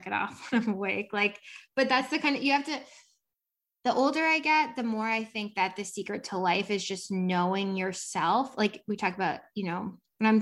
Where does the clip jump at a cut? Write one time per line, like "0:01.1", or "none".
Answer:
none